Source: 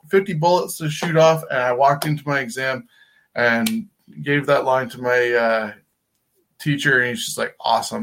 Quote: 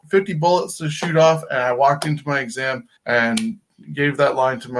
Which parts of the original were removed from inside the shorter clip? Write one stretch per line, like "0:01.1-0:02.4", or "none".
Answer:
0:03.0-0:03.3